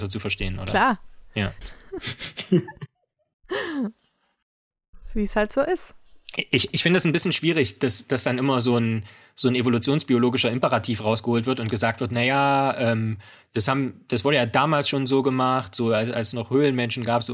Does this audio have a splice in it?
yes; 1 cut; at 1.6 s

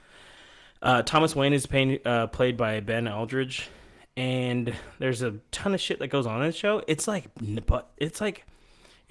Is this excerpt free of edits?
yes; 0 cuts

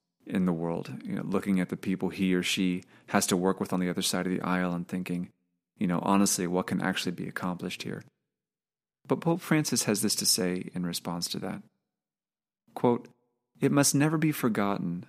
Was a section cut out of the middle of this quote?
no; 0 cuts

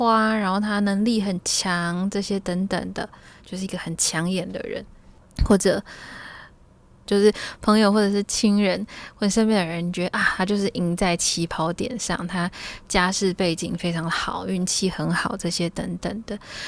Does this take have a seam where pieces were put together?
yes; 1 cut; at 7.1 s

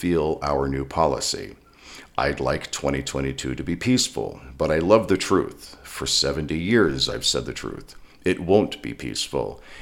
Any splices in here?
no; 0 cuts

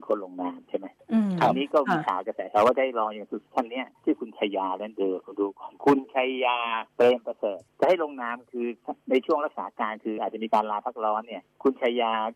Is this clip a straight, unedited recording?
no; 2 cuts; at 6.9 s, 10.2 s

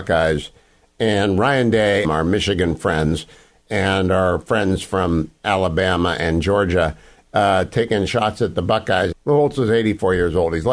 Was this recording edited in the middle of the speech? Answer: yes; 2 cuts; at 2.0 s, 9.1 s

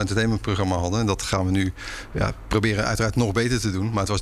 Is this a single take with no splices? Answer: yes; 0 cuts

